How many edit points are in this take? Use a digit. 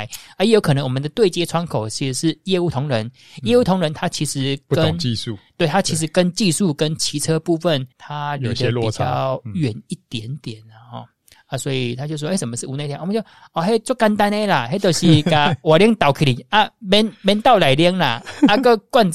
1